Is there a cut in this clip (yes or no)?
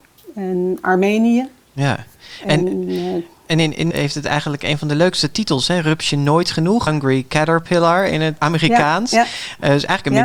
yes